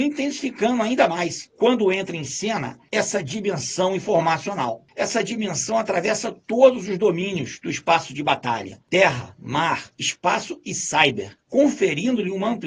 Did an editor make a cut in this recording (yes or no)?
yes